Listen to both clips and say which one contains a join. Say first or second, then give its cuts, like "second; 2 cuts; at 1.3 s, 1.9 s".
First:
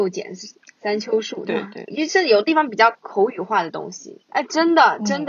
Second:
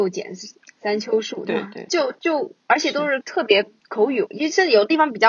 first; 2 cuts; at 1.9 s, 4.3 s